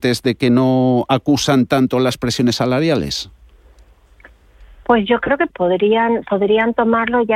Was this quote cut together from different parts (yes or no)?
yes